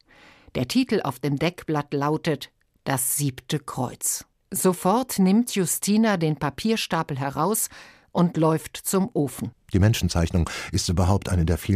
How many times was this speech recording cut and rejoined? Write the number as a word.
one